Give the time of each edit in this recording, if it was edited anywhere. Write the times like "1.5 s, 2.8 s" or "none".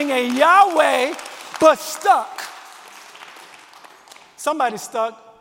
none